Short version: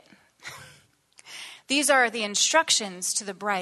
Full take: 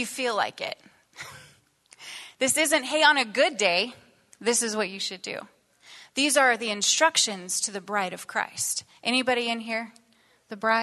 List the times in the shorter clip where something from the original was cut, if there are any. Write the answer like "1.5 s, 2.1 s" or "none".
1.6 s